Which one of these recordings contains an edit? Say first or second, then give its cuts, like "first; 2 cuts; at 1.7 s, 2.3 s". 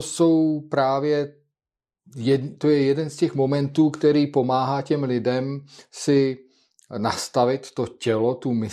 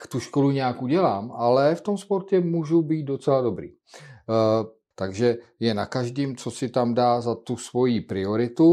second; 1 cut; at 4.9 s